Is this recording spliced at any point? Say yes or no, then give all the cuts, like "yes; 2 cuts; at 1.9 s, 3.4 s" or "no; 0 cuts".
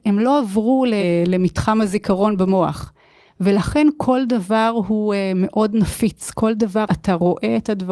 yes; 1 cut; at 6.9 s